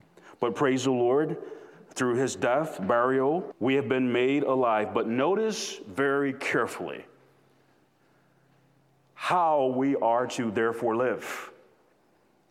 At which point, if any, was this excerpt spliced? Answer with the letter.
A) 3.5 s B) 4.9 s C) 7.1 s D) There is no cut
A